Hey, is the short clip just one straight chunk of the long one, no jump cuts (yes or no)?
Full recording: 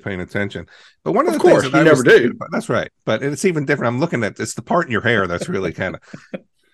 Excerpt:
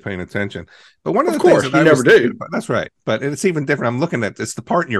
yes